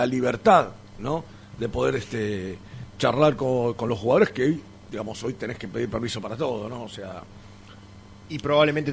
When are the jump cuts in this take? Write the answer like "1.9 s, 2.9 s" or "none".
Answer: none